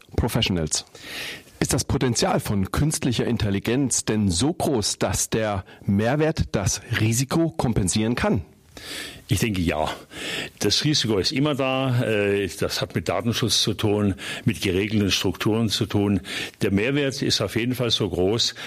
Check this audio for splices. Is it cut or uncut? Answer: cut